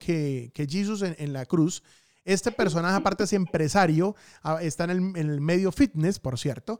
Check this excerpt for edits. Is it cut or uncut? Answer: uncut